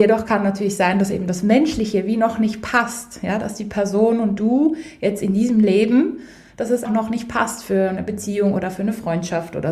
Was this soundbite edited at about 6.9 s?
yes; 1 cut; at 6.9 s

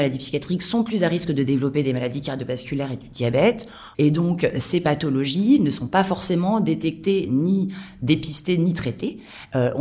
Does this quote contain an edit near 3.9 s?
yes; 1 cut; at 3.9 s

